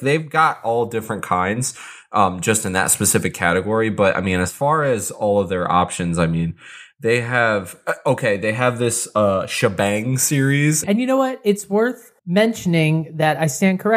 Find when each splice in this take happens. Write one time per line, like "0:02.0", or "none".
0:10.8
0:12.2

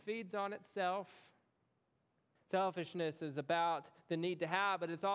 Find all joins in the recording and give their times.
0:02.4

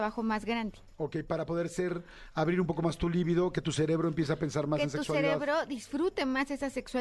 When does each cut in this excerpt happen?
none

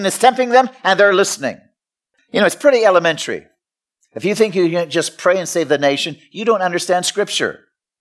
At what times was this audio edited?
none

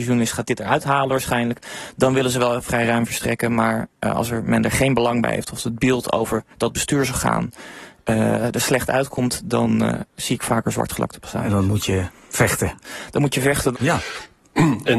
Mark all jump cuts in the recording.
0:13.7

